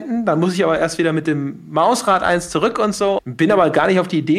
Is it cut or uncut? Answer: cut